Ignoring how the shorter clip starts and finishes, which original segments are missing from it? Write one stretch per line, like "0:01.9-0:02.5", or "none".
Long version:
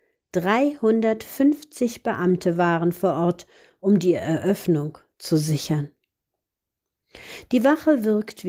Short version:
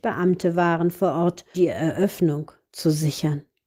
0:03.6-0:04.0